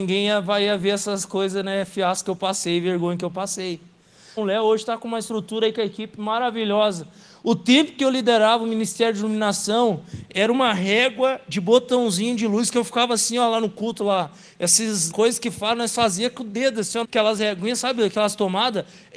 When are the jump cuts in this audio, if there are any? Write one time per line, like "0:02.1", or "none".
0:04.4
0:15.1
0:17.0

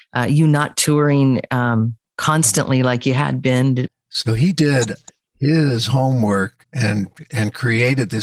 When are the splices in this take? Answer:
0:03.9
0:06.6

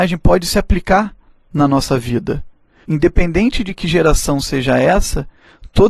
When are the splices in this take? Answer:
0:02.8

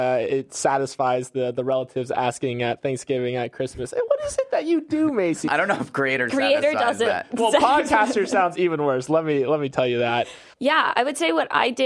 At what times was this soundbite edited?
0:05.5
0:10.5

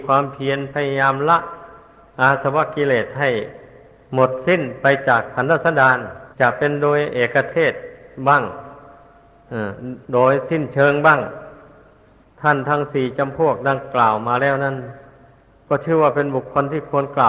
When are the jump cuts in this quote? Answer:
0:06.3

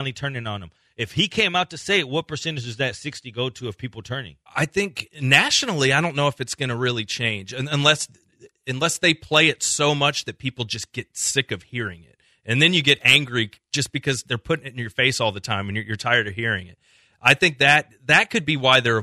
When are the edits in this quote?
0:04.5

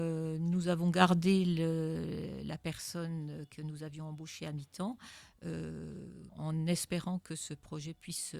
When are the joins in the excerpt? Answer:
0:06.3

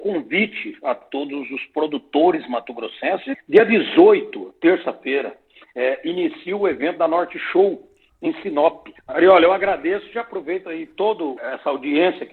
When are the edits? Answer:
0:09.0

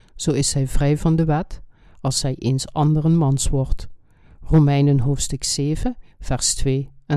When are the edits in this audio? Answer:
0:01.9

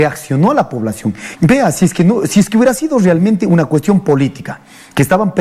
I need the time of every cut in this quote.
0:01.4

